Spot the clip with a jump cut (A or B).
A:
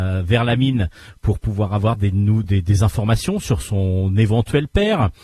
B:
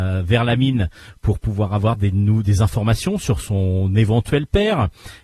B